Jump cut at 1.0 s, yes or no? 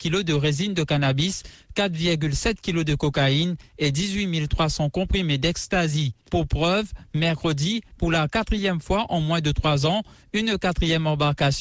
no